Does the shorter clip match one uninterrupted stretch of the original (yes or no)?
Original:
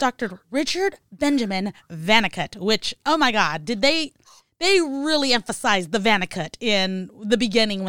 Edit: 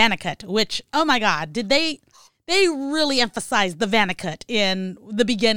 yes